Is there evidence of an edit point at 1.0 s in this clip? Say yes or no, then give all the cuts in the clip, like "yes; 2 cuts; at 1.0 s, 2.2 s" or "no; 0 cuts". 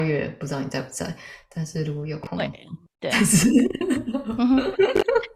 no; 1 cut; at 2.9 s